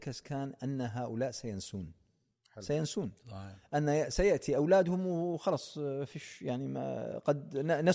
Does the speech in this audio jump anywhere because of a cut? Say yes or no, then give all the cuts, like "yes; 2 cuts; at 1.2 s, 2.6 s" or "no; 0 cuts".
no; 0 cuts